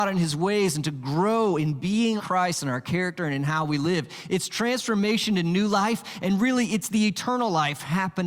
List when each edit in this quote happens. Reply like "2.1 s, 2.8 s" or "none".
2.2 s